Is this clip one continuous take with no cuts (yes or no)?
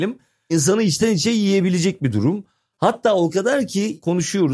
yes